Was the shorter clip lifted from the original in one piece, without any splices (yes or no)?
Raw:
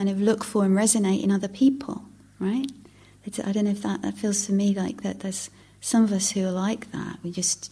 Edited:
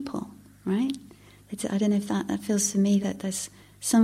no